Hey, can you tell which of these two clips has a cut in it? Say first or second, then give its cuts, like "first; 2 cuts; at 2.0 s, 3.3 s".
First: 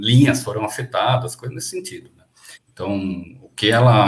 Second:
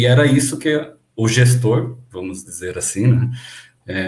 first; 1 cut; at 2.6 s